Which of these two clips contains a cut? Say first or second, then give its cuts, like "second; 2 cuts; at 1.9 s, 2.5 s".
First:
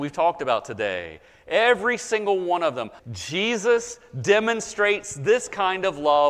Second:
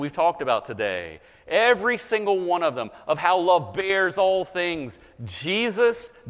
first; 1 cut; at 3.0 s